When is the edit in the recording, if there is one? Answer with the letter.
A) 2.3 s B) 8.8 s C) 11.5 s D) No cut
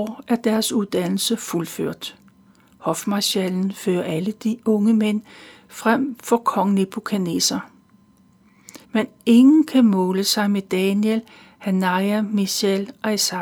B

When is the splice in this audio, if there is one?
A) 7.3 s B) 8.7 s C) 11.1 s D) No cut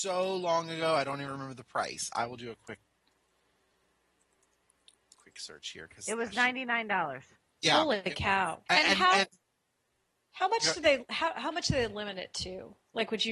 B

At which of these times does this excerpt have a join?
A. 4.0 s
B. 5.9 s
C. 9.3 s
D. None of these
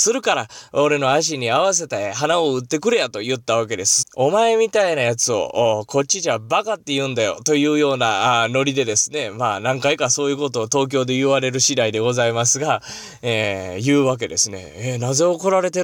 A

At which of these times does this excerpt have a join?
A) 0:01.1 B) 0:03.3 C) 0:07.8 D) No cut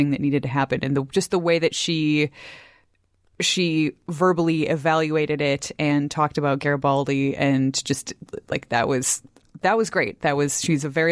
D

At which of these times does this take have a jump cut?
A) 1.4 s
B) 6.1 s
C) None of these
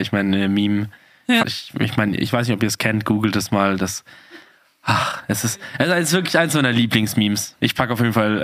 A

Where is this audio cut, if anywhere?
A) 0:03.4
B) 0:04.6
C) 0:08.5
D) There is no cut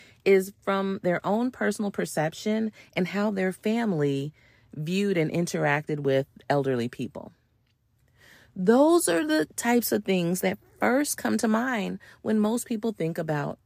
C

